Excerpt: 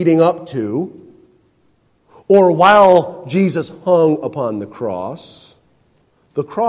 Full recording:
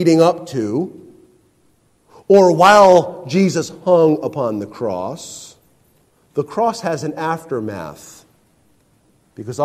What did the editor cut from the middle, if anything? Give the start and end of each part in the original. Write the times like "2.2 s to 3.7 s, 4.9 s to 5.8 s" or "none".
none